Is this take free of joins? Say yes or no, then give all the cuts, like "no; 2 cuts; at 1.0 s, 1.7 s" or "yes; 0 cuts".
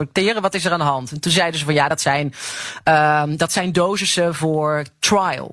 yes; 0 cuts